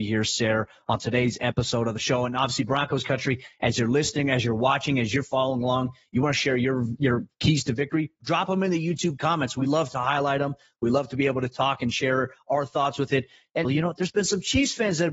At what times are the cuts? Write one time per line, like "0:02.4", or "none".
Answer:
0:13.6